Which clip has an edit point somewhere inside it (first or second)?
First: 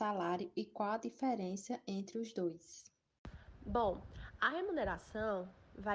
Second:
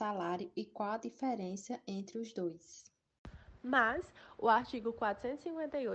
second